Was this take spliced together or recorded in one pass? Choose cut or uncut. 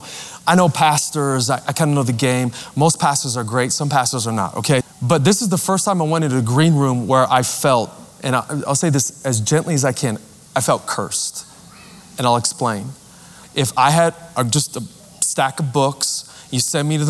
cut